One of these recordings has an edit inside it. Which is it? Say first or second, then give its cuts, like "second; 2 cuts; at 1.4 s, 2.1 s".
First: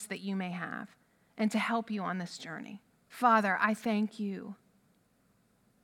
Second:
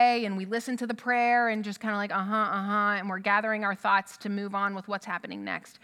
first; 1 cut; at 3.1 s